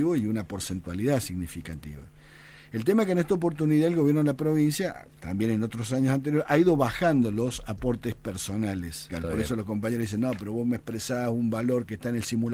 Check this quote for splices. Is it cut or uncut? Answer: cut